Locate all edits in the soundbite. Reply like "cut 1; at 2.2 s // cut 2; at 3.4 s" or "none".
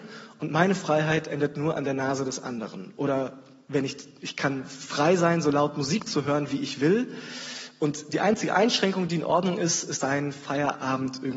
cut 1; at 10.0 s